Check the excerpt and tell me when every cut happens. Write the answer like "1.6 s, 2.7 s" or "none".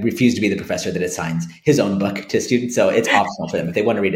none